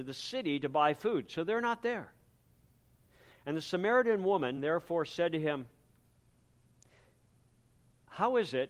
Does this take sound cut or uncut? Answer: uncut